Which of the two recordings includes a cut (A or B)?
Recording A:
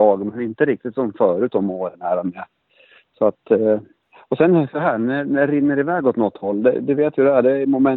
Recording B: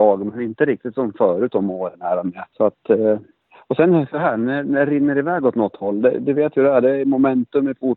B